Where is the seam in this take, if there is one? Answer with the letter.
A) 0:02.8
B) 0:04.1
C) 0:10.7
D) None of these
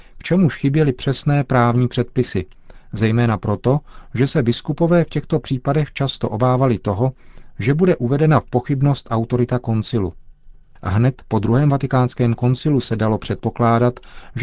D